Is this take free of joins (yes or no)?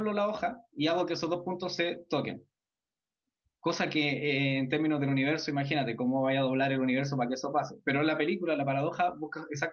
yes